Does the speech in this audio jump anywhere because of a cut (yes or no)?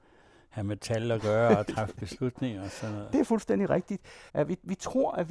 yes